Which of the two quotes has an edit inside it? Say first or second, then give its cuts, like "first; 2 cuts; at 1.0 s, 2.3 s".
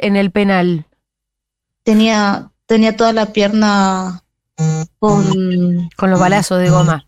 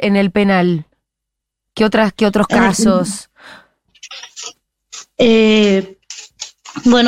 first; 1 cut; at 1.6 s